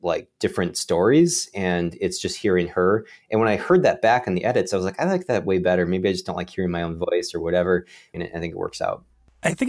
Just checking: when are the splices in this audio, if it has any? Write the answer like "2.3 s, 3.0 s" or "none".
8.1 s